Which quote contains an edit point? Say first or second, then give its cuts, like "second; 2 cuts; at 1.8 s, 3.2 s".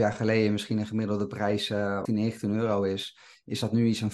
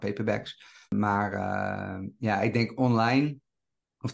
first; 1 cut; at 2.1 s